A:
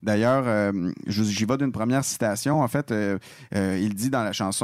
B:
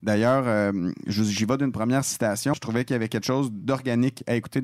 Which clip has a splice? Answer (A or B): B